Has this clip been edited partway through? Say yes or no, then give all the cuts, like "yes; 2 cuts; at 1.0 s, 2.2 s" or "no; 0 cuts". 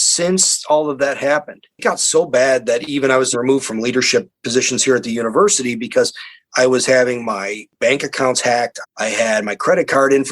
yes; 2 cuts; at 3.3 s, 8.8 s